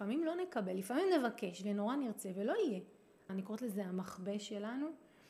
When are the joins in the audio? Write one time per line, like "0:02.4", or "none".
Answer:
0:03.3